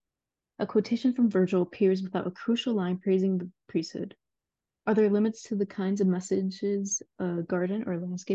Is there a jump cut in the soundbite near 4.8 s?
yes; 1 cut; at 4.8 s

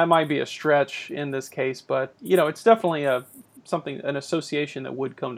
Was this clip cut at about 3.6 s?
yes; 2 cuts; at 2.1 s, 3.6 s

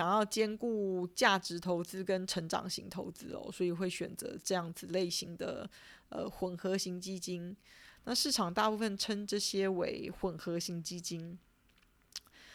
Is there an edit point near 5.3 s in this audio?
no; 1 cut; at 8.0 s

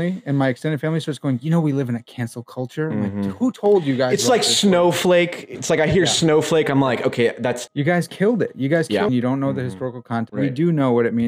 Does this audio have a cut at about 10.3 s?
yes; 3 cuts; at 7.7 s, 9.1 s, 10.3 s

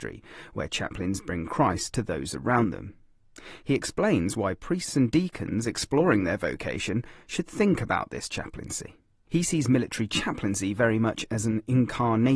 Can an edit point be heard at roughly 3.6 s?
no; 1 cut; at 9.3 s

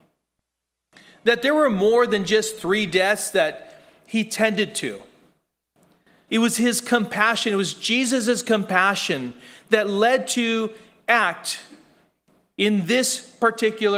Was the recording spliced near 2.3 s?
no; 1 cut; at 6.3 s

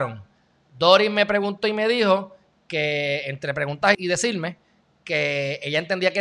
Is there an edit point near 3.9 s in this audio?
yes; 1 cut; at 3.9 s

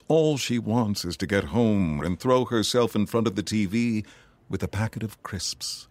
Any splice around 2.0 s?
yes; 1 cut; at 2.0 s

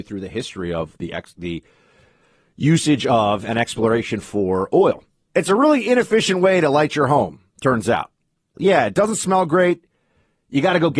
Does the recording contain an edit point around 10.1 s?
no; 2 cuts; at 5.3 s, 8.6 s

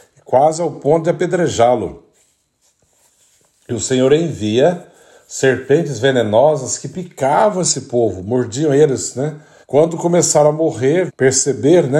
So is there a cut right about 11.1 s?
yes; 2 cuts; at 9.6 s, 11.1 s

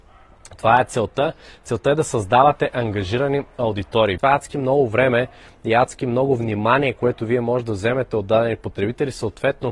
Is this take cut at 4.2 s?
yes; 1 cut; at 4.2 s

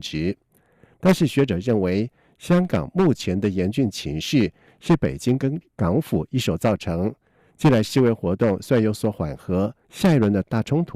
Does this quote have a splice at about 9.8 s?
yes; 1 cut; at 9.8 s

